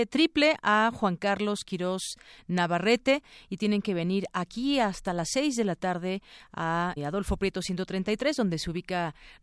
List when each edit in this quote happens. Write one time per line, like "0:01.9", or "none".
0:07.0